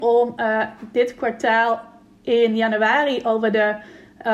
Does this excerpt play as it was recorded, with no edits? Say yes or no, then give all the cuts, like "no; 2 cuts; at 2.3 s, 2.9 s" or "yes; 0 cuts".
yes; 0 cuts